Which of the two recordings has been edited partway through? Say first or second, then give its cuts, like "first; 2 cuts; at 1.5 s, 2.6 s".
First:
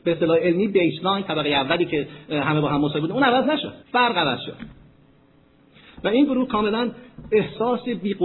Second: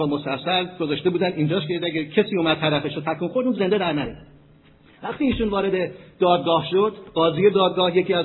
first; 1 cut; at 3.8 s